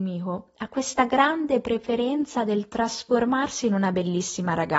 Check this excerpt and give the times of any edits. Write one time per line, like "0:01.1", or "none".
none